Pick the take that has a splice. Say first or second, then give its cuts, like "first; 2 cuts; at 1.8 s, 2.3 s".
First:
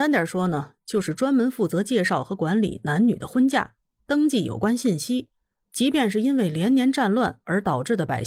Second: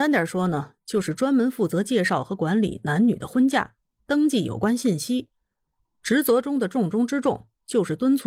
first; 1 cut; at 5.6 s